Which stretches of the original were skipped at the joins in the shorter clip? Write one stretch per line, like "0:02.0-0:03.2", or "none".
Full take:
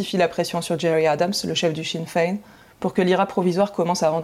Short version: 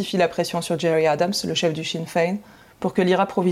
none